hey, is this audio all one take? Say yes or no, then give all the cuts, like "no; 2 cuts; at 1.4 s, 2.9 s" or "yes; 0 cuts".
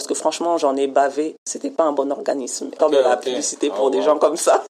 no; 1 cut; at 2.8 s